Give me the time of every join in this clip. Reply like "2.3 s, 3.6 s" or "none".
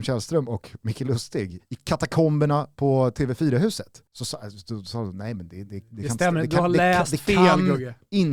4.1 s

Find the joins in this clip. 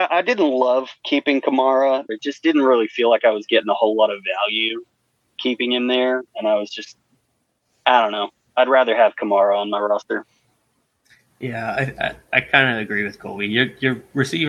2.1 s, 6.3 s

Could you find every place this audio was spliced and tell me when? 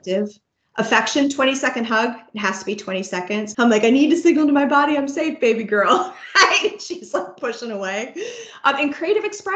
3.5 s

